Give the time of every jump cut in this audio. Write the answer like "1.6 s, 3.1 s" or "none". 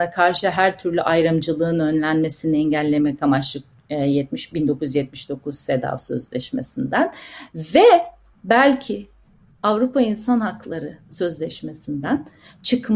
7.5 s